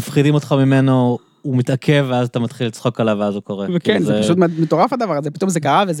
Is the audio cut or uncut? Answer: uncut